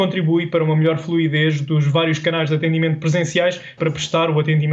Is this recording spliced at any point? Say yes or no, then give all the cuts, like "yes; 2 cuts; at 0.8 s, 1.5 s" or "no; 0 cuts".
yes; 1 cut; at 3.8 s